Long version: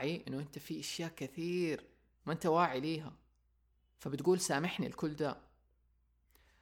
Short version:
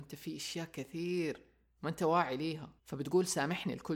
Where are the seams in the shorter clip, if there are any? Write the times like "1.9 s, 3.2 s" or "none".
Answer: 2.8 s